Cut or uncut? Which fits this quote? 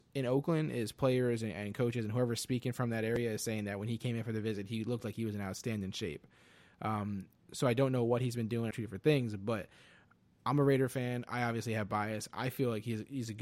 cut